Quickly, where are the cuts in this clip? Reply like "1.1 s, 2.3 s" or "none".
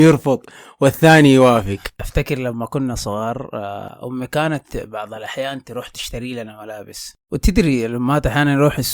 7.2 s